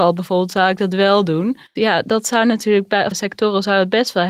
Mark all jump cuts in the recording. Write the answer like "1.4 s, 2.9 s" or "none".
1.8 s, 3.1 s